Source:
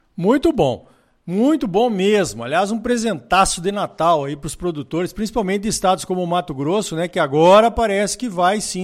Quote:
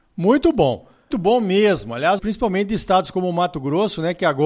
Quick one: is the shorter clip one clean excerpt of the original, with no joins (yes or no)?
no